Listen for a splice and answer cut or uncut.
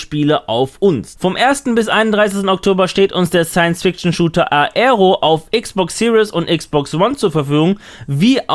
cut